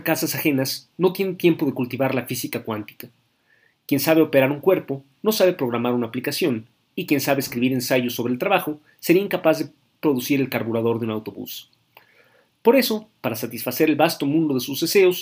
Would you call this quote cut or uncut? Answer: uncut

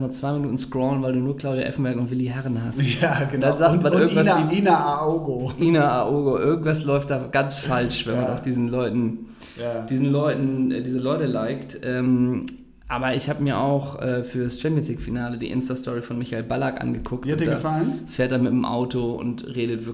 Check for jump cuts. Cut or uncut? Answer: uncut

